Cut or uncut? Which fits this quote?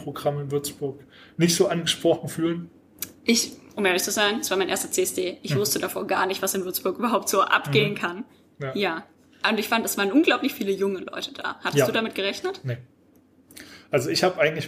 uncut